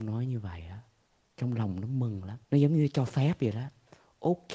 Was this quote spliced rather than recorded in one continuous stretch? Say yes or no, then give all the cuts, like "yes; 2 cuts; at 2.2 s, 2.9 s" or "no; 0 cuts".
yes; 1 cut; at 2.4 s